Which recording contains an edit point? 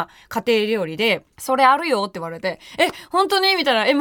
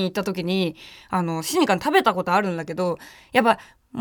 first; 1 cut; at 1.3 s

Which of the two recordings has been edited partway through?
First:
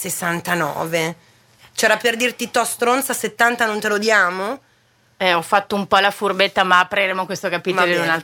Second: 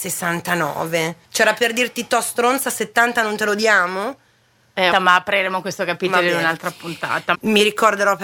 second; 3 cuts; at 1.2 s, 4.9 s, 7.3 s

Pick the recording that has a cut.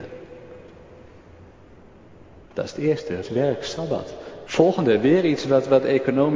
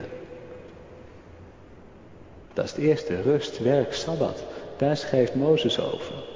first; 2 cuts; at 3.2 s, 4.5 s

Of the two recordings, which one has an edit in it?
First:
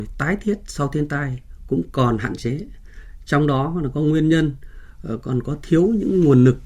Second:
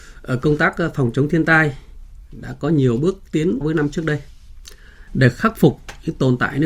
second; 2 cuts; at 3.6 s, 5.1 s

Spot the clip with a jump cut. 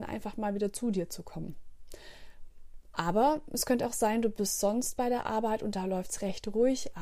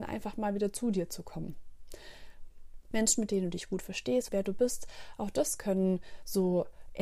second; 2 cuts; at 2.9 s, 4.3 s

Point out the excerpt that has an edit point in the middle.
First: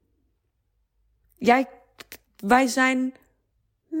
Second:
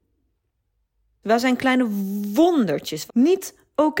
second; 2 cuts; at 1.2 s, 3.1 s

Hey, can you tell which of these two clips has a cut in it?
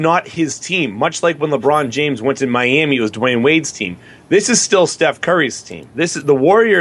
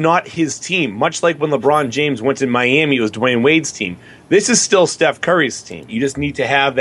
second; 1 cut; at 5.9 s

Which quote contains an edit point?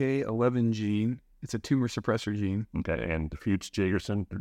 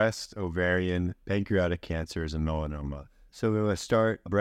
second; 1 cut; at 3.3 s

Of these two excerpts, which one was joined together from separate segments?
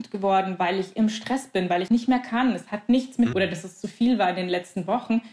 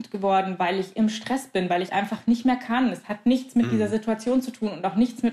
first; 2 cuts; at 1.9 s, 3.3 s

